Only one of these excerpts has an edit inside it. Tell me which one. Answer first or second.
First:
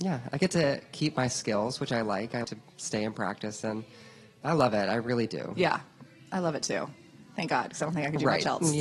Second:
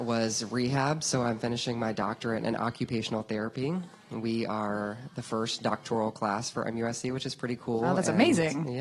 first